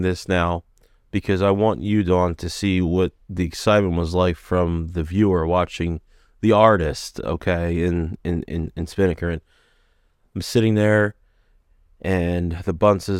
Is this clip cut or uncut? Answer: uncut